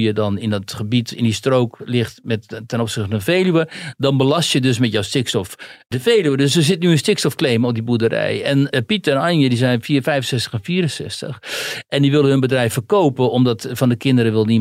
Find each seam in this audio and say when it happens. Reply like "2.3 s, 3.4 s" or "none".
none

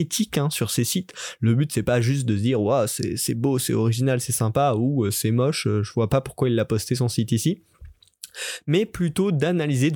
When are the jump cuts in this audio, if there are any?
none

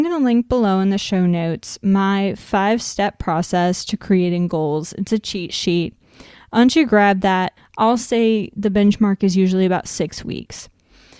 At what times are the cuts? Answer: 7.6 s

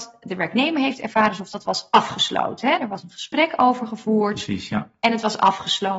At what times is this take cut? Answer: none

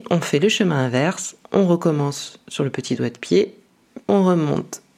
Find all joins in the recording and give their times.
4.0 s

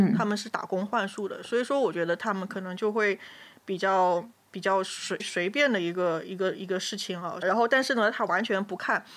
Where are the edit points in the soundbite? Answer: 5.2 s, 7.4 s

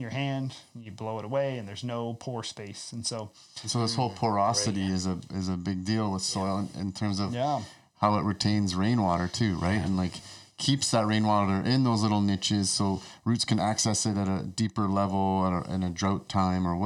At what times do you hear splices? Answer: none

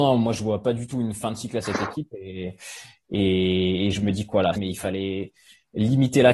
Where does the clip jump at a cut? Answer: 4.6 s

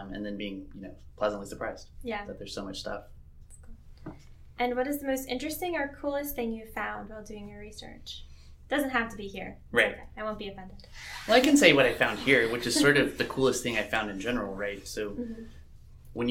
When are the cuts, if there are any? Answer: none

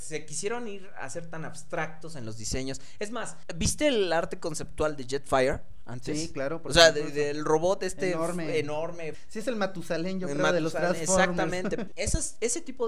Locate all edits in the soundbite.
9.1 s, 11.9 s

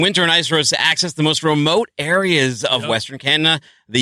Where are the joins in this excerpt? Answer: none

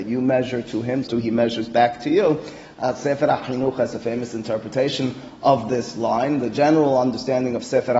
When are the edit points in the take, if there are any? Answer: 1.0 s

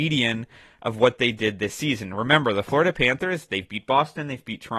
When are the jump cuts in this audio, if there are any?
none

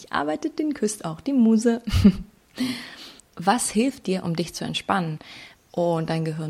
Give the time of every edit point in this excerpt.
3.2 s, 5.6 s

